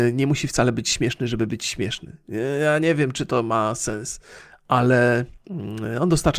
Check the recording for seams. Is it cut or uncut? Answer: uncut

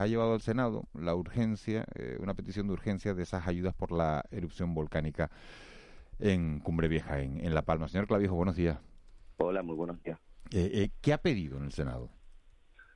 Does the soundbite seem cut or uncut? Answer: uncut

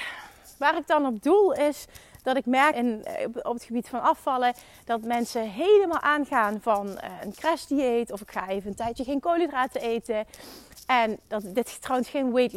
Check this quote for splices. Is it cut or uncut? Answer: cut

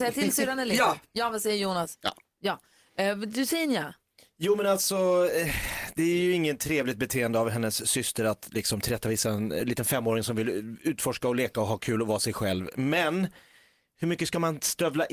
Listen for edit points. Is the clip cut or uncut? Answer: uncut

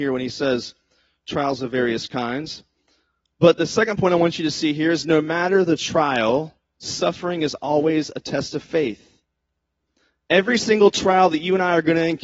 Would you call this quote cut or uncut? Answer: uncut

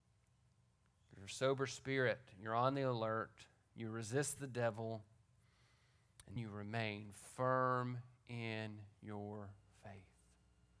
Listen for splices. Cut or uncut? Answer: cut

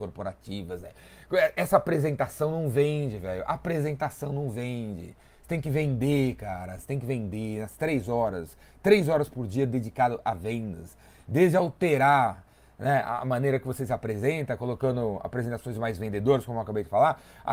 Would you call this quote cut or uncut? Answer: uncut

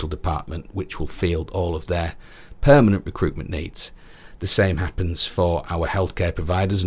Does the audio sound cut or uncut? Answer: uncut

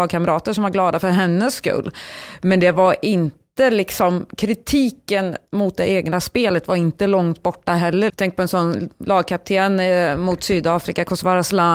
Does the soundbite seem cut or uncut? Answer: cut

